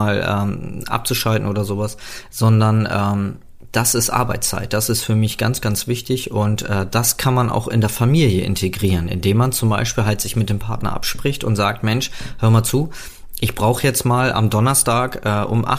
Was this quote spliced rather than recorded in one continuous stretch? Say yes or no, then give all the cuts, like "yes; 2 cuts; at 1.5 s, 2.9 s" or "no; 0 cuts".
no; 0 cuts